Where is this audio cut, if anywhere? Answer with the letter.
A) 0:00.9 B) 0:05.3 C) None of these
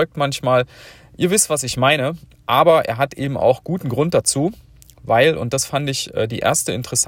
C